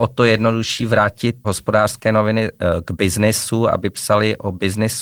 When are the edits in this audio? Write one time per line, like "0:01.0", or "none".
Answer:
0:01.4